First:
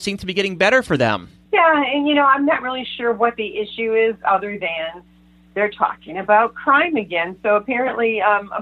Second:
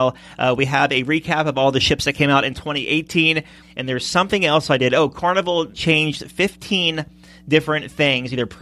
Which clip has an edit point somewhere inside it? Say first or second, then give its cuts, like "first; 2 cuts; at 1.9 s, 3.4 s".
second; 1 cut; at 3.6 s